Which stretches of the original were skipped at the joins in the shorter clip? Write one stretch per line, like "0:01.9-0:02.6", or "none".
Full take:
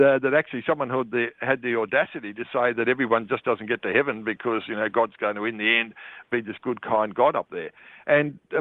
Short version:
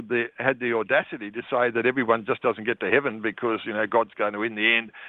none